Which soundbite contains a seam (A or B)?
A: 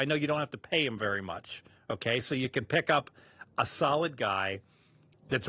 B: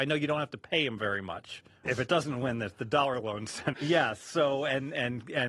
B